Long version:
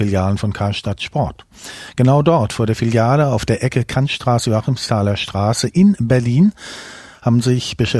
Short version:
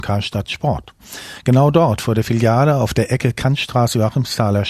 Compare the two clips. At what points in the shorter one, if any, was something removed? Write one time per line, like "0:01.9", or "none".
none